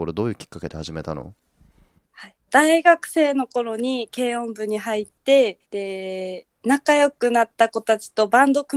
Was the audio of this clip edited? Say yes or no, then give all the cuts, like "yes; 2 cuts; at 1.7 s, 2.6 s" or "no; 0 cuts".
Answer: yes; 2 cuts; at 2.5 s, 5.6 s